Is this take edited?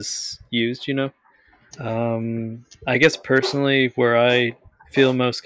yes; 1 cut; at 1.7 s

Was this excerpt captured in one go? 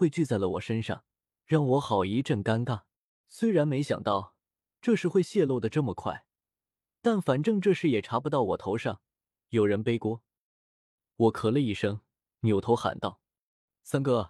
no; 1 cut; at 3.2 s

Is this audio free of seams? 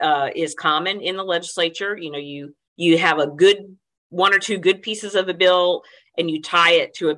yes; 0 cuts

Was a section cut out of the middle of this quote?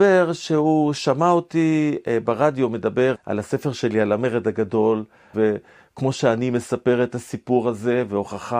yes; 2 cuts; at 3.1 s, 5.3 s

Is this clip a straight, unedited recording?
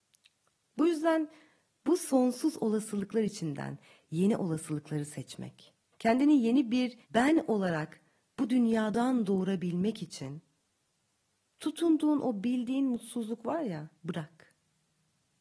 no; 3 cuts; at 5.9 s, 7.0 s, 13.9 s

